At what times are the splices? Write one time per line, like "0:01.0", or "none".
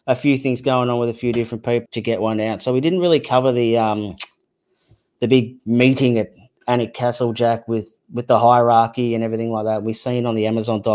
0:01.9